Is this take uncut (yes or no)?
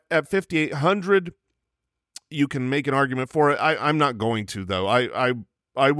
yes